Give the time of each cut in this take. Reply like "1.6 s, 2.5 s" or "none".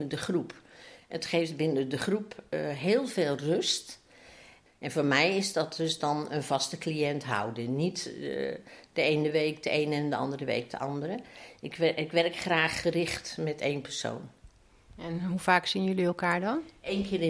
4.7 s